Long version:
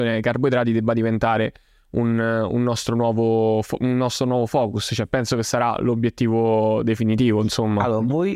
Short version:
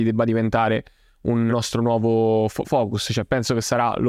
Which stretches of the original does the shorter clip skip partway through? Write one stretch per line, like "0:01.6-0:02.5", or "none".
0:02.2-0:02.6
0:03.8-0:04.5